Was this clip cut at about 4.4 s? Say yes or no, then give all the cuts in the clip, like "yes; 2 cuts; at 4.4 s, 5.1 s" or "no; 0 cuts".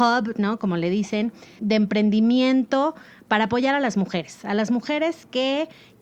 no; 1 cut; at 1.6 s